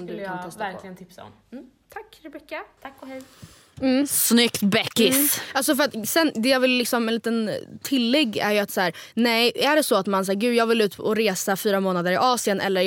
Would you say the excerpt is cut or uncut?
uncut